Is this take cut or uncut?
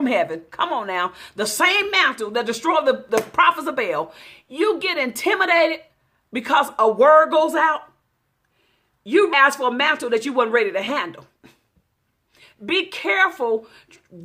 cut